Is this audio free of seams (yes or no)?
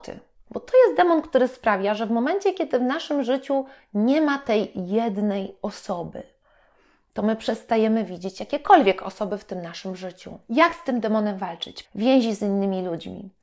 no